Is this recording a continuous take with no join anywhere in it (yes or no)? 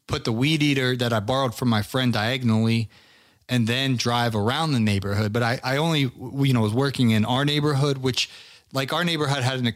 yes